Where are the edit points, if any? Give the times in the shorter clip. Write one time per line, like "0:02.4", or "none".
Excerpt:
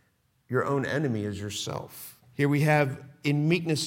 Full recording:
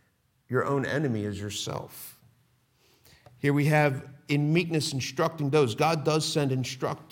0:02.2